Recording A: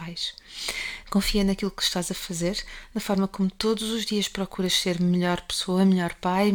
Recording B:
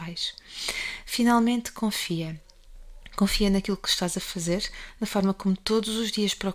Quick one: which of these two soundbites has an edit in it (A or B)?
A